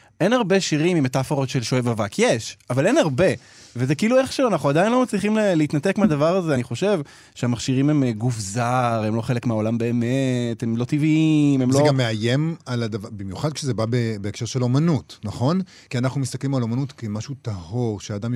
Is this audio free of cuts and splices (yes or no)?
yes